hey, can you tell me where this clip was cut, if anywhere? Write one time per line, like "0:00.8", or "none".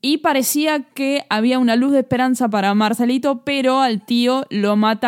none